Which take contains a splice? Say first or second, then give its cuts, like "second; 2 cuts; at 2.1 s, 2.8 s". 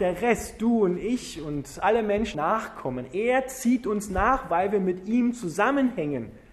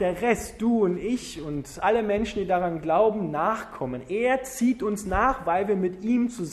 first; 1 cut; at 2.3 s